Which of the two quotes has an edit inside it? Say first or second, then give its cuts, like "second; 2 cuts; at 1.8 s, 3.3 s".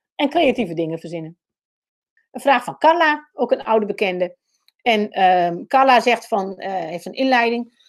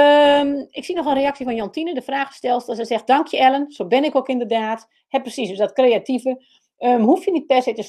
first; 1 cut; at 2.2 s